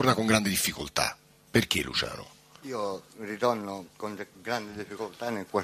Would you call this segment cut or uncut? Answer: uncut